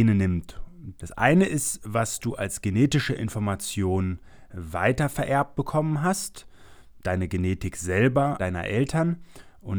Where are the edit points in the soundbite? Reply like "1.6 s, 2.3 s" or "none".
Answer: 1.0 s, 8.4 s